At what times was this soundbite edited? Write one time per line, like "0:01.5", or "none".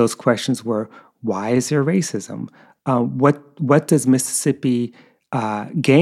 none